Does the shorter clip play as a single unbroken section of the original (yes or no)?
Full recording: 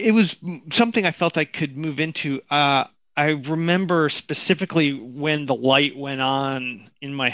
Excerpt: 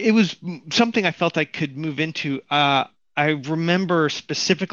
yes